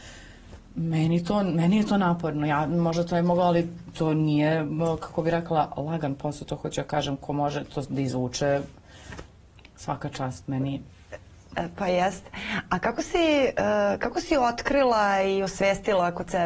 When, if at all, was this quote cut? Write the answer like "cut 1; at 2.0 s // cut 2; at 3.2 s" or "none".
none

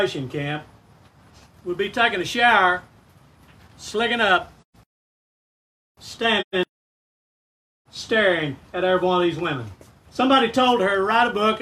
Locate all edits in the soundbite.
cut 1; at 7.9 s // cut 2; at 10.1 s

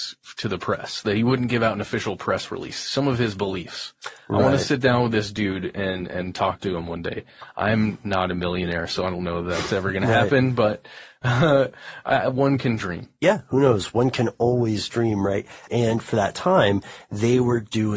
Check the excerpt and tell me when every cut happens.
cut 1; at 15.7 s

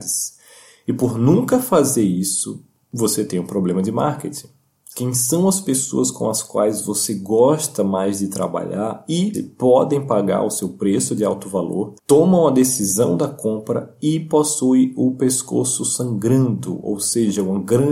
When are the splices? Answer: cut 1; at 4.9 s // cut 2; at 9.3 s // cut 3; at 12.0 s

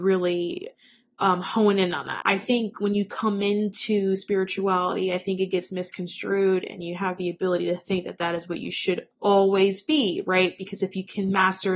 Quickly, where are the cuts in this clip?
cut 1; at 2.2 s // cut 2; at 9.1 s

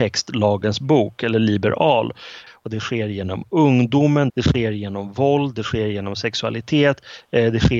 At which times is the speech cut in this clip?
cut 1; at 2.5 s // cut 2; at 4.3 s

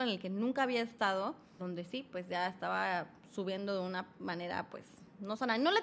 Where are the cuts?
cut 1; at 1.6 s

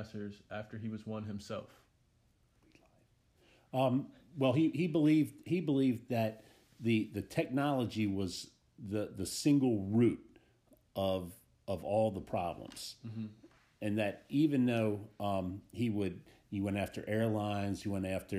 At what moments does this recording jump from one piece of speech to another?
none

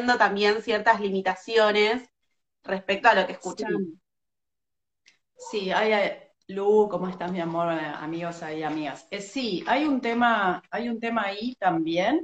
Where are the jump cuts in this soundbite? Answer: none

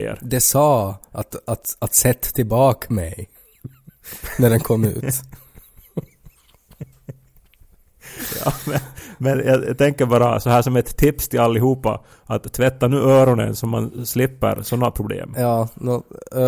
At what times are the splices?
none

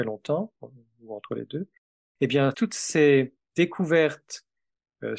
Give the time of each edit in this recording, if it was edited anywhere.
cut 1; at 2.5 s

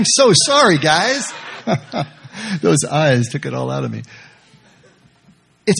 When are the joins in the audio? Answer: cut 1; at 1.6 s // cut 2; at 3.3 s

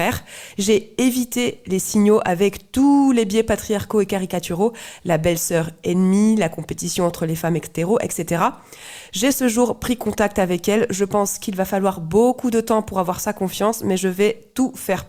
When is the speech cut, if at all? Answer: none

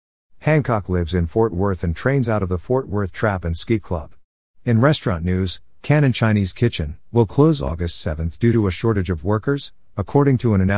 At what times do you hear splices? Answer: cut 1; at 7.1 s

